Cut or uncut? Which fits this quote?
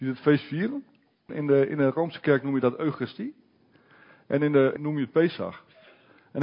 cut